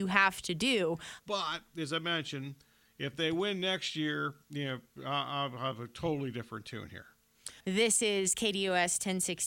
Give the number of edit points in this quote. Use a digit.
2